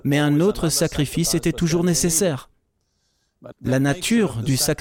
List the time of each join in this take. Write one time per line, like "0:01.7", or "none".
0:03.5